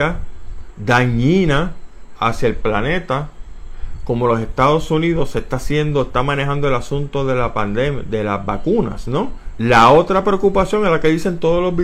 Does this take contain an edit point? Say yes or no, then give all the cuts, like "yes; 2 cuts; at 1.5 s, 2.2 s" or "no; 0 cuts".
yes; 1 cut; at 9.6 s